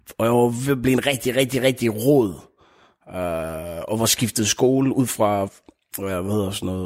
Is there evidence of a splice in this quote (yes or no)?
yes